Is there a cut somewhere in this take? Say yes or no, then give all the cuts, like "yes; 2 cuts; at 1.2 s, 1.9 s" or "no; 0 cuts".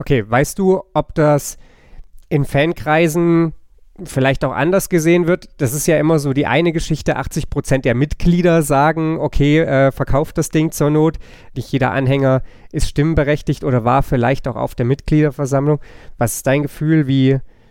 yes; 1 cut; at 11.5 s